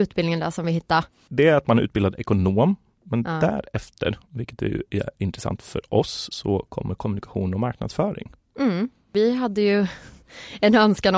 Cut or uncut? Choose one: uncut